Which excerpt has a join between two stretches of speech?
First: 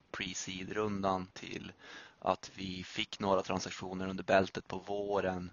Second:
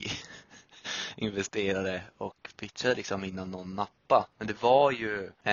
first; 1 cut; at 1.3 s

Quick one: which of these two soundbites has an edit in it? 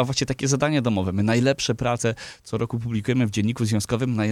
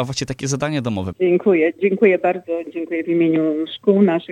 second; 1 cut; at 1.1 s

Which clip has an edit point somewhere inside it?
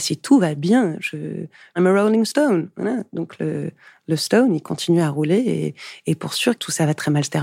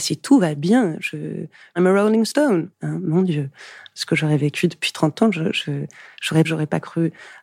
second; 2 cuts; at 2.7 s, 6.4 s

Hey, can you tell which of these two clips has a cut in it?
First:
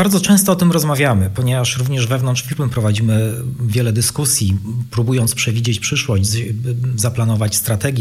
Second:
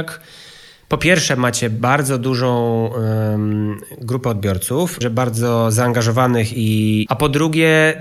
second; 2 cuts; at 5.0 s, 7.1 s

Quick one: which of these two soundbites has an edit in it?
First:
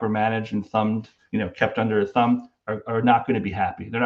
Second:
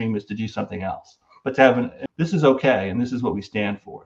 second; 1 cut; at 2.1 s

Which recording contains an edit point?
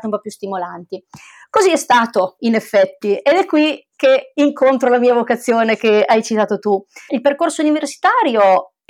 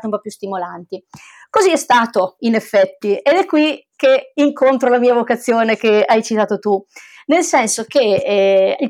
first; 1 cut; at 7.1 s

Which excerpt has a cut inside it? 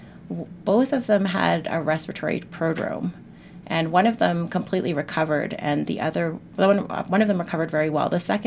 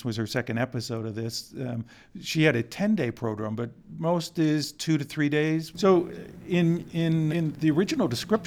second; 2 cuts; at 5.7 s, 7.3 s

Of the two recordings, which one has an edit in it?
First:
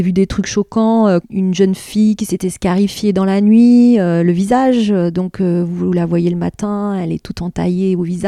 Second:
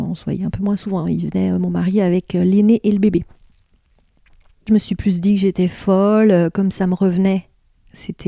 first; 1 cut; at 1.2 s

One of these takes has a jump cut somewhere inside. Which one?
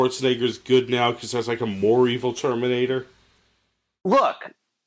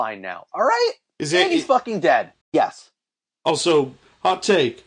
second; 1 cut; at 2.4 s

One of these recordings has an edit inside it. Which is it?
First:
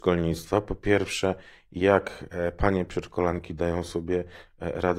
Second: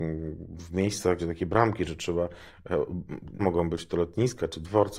second; 2 cuts; at 1.2 s, 3.4 s

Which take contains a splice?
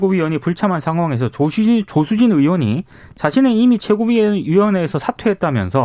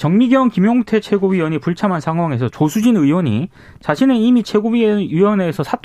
second; 1 cut; at 2.5 s

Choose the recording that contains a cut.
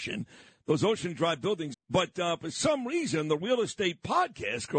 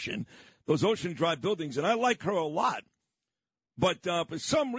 first; 1 cut; at 1.7 s

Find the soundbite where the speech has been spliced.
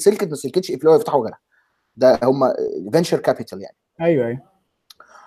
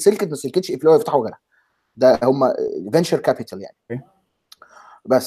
second; 1 cut; at 3.9 s

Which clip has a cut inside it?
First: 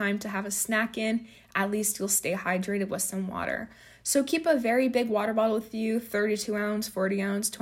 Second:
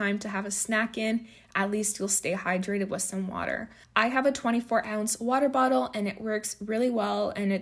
second; 1 cut; at 3.8 s

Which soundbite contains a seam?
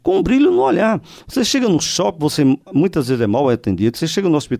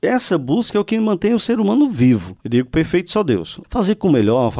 second; 2 cuts; at 2.4 s, 3.6 s

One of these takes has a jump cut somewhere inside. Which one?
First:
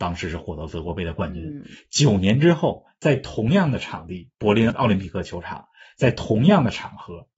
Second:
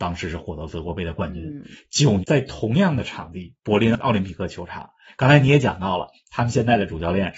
second; 2 cuts; at 2.2 s, 5.1 s

